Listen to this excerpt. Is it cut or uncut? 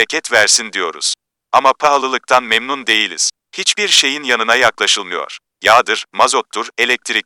uncut